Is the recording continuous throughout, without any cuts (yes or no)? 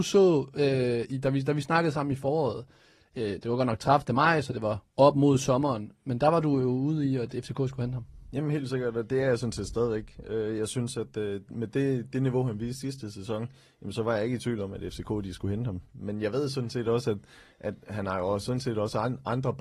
yes